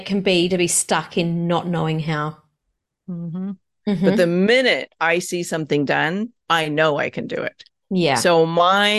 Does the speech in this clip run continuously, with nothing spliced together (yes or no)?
no